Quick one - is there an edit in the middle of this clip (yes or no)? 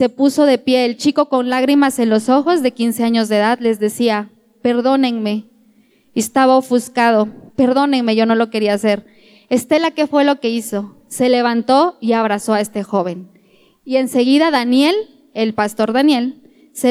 yes